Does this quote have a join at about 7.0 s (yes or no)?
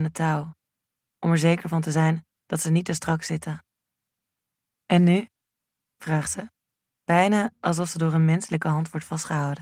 yes